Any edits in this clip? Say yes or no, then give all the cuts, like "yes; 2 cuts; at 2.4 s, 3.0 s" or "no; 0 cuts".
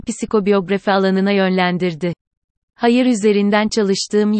no; 0 cuts